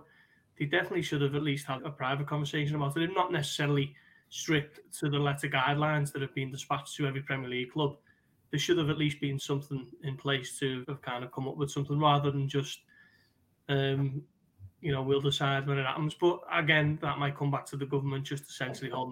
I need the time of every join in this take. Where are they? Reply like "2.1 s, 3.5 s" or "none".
1.8 s, 10.8 s